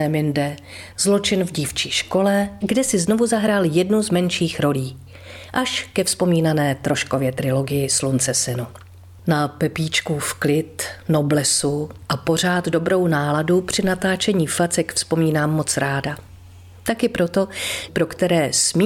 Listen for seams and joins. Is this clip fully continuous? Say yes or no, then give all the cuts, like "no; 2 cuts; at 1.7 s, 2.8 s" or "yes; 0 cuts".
no; 3 cuts; at 0.9 s, 2.6 s, 17.9 s